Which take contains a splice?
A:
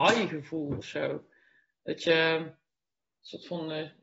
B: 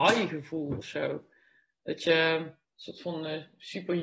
B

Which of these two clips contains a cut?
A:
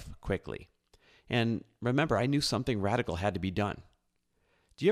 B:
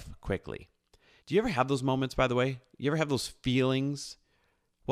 B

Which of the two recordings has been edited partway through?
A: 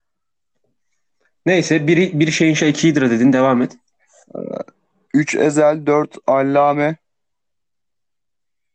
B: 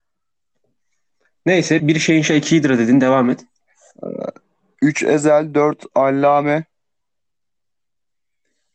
B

